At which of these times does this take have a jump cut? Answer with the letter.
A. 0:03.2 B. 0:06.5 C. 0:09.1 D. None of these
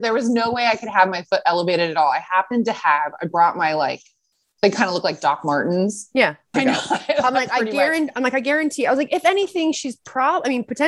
B